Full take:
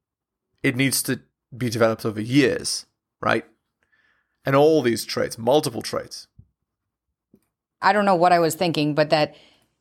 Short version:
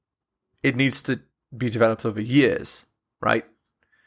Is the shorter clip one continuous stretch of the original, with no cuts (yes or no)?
yes